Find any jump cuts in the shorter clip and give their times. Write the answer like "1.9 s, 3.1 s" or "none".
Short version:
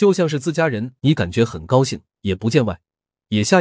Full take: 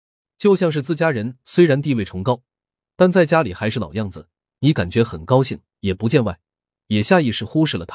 1.0 s